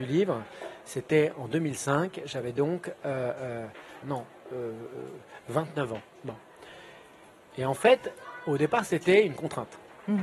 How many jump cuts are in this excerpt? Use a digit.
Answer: 1